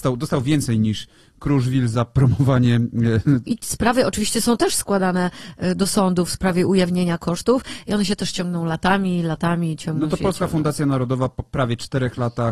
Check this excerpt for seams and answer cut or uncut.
cut